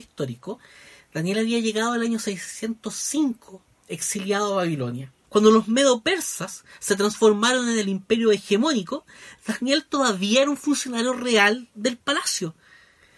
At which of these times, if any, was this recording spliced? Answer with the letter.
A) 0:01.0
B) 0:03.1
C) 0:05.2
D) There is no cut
C